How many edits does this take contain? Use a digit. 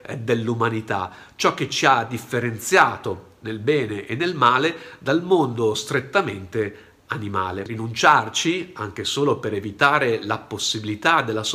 0